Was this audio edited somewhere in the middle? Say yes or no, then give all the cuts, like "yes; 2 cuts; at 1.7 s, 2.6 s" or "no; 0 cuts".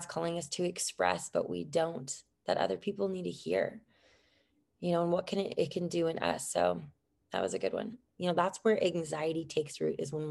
yes; 1 cut; at 8.1 s